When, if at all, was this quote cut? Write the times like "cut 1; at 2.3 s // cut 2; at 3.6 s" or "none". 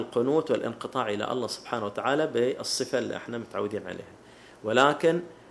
none

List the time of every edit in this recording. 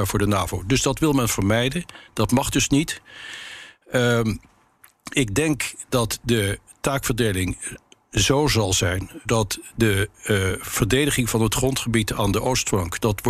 cut 1; at 9.2 s

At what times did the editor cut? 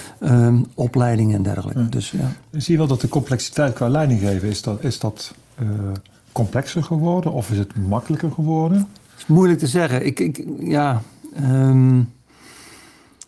none

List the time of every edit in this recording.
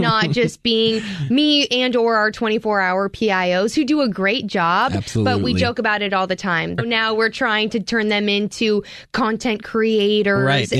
cut 1; at 6.8 s

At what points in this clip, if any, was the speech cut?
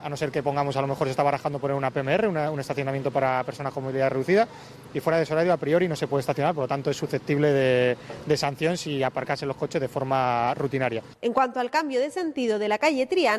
none

